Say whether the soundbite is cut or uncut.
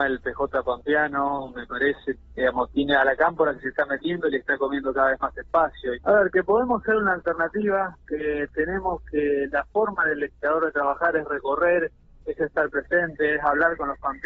cut